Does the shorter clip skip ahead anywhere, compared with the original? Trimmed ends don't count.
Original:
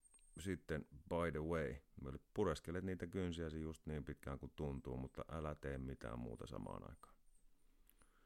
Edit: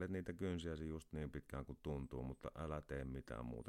no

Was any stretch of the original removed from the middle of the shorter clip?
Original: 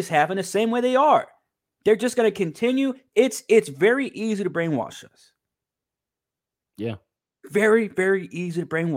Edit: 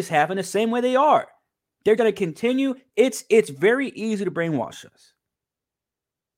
yes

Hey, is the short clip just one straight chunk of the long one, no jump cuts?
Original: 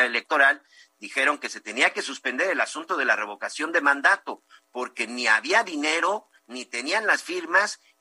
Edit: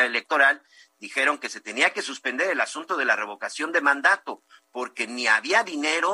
yes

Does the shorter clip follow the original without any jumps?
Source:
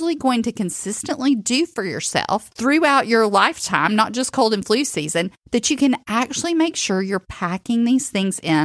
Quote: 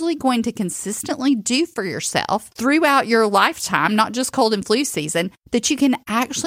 yes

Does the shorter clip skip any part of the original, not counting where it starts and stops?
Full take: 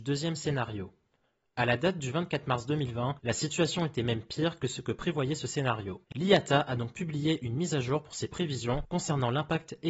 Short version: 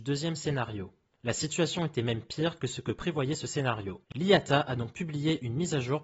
yes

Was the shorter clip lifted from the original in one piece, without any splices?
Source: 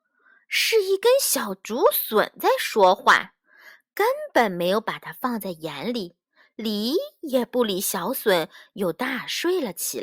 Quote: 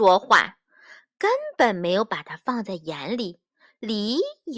yes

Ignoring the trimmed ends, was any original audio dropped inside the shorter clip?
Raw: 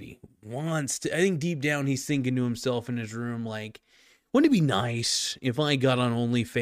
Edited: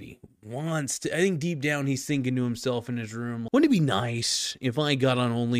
yes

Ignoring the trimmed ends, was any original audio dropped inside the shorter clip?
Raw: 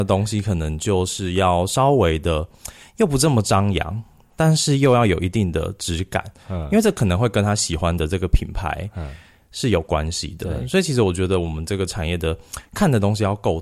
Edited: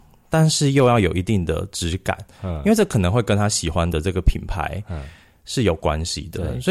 no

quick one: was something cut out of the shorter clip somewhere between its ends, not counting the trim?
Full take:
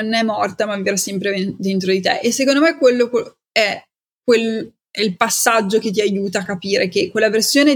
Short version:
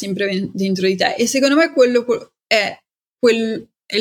no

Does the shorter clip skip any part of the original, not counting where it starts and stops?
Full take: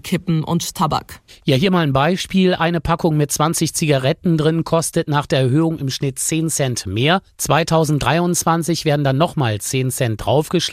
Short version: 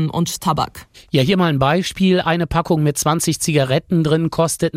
no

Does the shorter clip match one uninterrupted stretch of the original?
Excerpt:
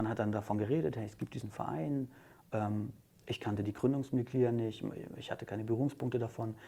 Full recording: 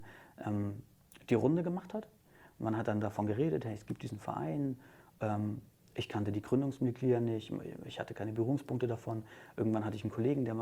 yes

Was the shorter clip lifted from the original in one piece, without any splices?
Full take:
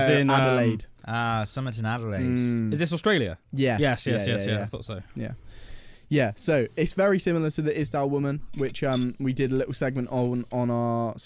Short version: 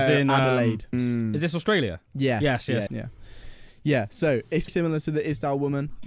no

